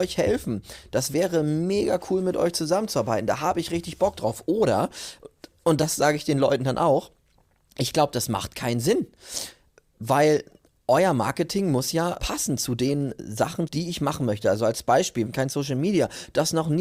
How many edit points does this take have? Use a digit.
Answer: 3